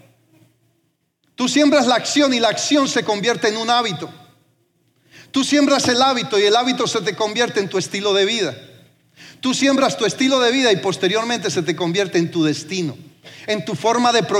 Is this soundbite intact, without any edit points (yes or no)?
yes